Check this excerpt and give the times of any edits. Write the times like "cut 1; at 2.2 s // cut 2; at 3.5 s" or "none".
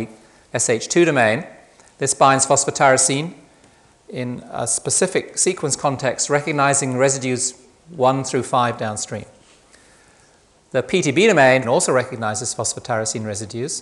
cut 1; at 11.6 s